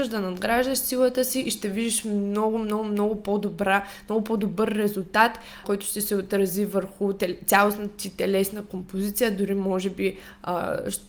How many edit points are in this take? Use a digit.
1